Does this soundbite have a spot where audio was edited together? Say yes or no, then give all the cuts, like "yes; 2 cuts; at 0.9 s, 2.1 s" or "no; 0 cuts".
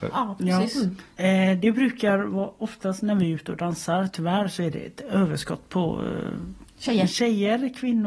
yes; 1 cut; at 1.2 s